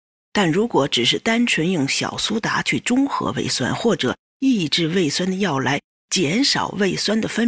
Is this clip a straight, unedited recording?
yes; 0 cuts

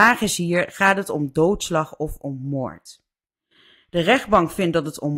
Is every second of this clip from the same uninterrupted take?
yes; 0 cuts

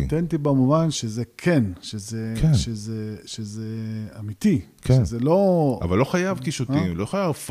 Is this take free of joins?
no; 1 cut; at 0.9 s

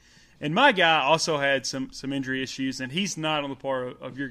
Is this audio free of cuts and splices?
yes; 0 cuts

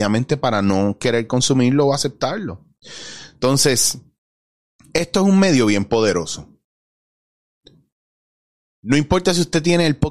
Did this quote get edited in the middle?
no; 0 cuts

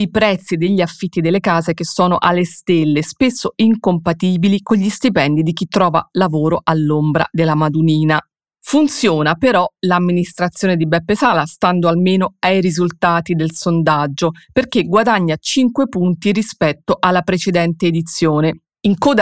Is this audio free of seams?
yes; 0 cuts

